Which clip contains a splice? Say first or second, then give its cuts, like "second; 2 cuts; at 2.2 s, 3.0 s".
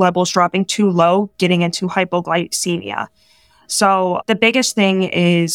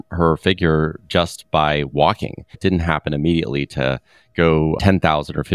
second; 1 cut; at 2.5 s